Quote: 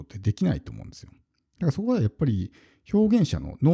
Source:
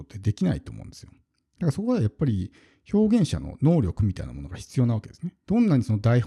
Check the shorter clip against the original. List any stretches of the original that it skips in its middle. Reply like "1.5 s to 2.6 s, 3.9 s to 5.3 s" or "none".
none